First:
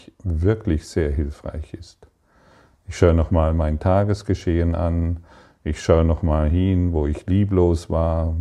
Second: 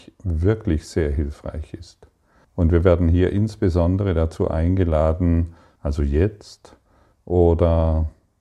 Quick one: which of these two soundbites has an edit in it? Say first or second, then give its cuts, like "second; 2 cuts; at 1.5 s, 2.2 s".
second; 2 cuts; at 2.4 s, 5.8 s